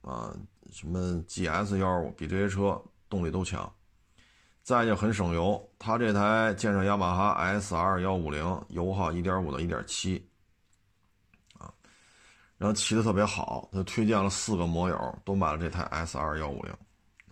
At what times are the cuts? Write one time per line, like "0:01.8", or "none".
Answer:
none